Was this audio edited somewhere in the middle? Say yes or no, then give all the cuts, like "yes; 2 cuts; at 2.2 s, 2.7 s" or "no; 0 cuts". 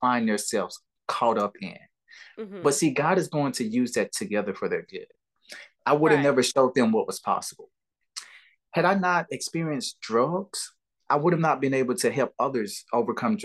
yes; 1 cut; at 5.8 s